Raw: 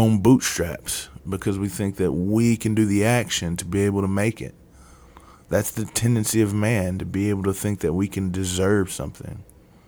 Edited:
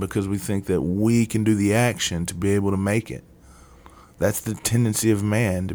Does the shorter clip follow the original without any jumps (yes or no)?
yes